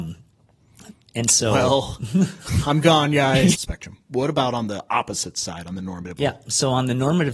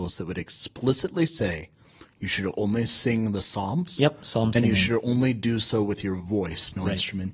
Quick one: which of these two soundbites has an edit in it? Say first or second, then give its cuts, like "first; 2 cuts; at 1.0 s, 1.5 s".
first; 2 cuts; at 3.5 s, 6.2 s